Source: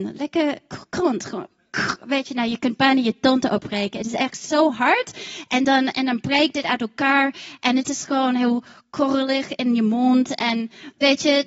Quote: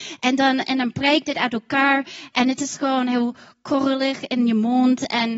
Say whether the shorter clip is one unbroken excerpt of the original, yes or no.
yes